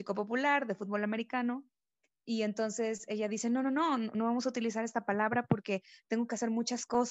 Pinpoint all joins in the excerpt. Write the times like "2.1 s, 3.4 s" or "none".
none